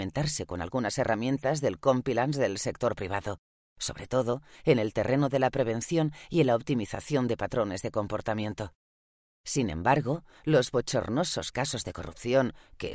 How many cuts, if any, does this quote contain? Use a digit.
1